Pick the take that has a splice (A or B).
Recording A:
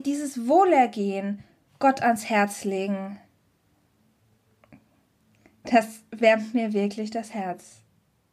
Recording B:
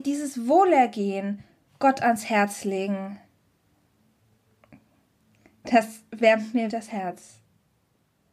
B